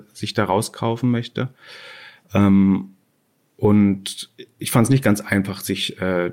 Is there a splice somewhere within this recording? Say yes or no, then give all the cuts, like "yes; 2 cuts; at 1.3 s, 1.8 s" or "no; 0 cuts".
no; 0 cuts